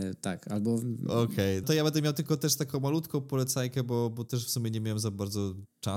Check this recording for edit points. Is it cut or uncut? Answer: cut